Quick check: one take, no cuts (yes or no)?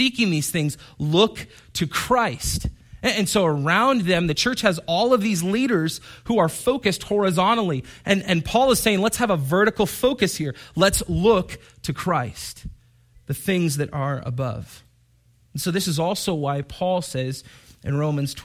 yes